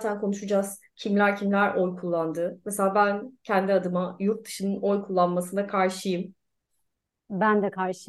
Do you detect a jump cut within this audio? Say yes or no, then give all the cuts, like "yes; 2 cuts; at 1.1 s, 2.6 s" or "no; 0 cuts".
no; 0 cuts